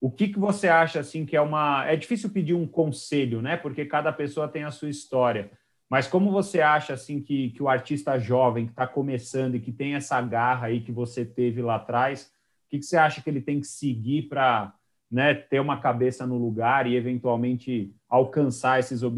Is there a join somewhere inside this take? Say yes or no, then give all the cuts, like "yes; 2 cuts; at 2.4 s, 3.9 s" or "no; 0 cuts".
no; 0 cuts